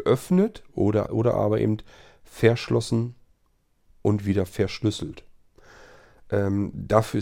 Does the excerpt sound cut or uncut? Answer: cut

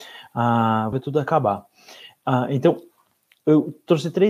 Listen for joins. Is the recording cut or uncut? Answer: cut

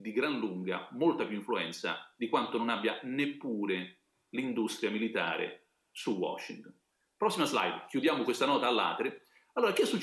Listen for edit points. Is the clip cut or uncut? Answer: uncut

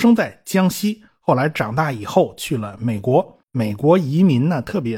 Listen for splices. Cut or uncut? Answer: cut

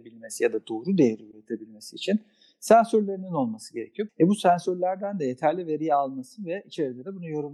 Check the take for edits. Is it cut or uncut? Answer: cut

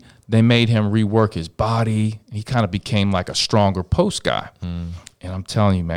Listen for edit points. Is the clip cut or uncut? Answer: uncut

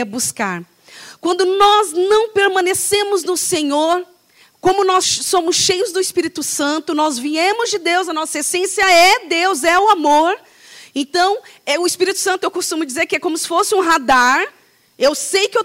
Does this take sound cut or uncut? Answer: cut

